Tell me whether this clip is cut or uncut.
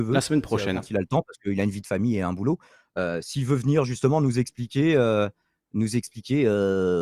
uncut